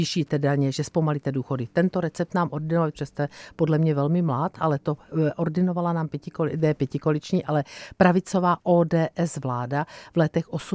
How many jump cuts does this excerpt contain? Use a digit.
2